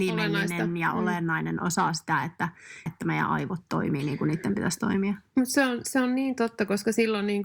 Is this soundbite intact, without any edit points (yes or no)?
no